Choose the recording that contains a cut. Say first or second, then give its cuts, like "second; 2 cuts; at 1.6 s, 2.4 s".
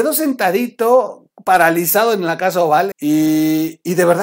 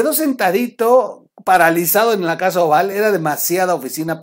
first; 1 cut; at 2.9 s